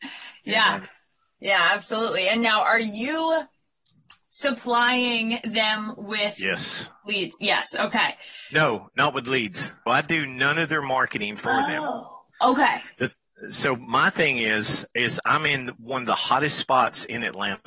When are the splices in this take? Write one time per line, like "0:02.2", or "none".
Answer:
0:09.9